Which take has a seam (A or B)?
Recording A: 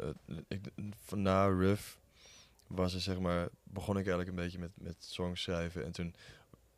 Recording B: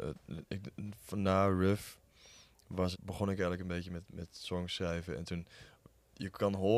B